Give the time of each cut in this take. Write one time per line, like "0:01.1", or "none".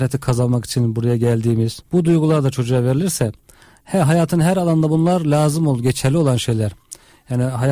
0:01.8